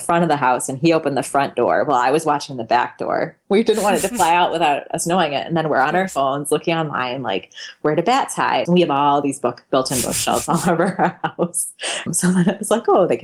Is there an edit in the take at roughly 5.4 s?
no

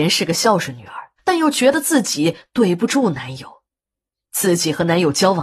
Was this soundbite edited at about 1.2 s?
yes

